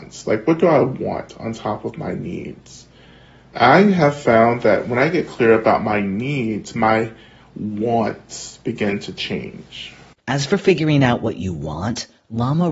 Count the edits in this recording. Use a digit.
0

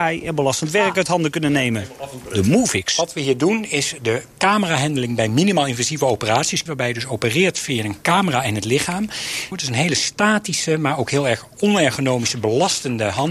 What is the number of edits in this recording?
2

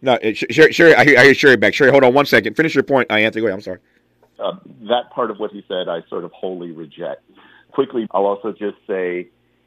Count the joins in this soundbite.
2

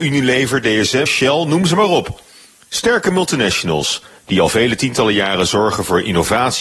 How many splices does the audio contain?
1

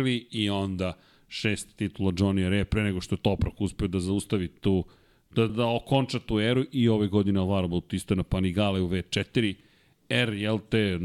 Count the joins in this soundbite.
1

